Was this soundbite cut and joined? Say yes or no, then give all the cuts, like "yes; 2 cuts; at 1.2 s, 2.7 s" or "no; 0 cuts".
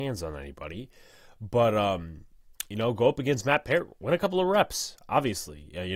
no; 0 cuts